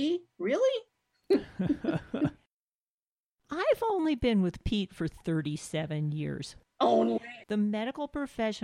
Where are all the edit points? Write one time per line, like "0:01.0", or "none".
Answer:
0:07.4